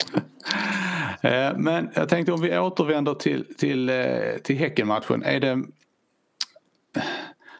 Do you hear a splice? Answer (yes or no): no